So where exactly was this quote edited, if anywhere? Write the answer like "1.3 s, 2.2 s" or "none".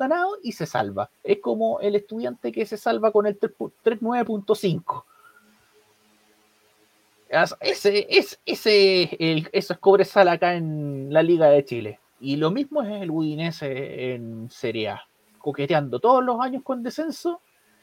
1.2 s